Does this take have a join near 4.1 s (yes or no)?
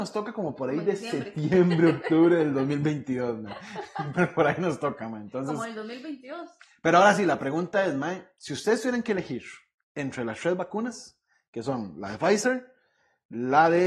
yes